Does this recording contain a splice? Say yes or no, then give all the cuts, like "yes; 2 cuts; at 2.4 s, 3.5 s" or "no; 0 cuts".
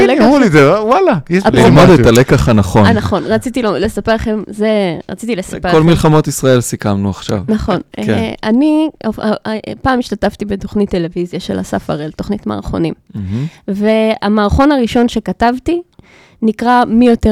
no; 0 cuts